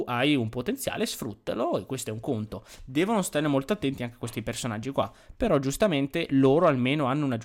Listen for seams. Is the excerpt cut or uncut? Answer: cut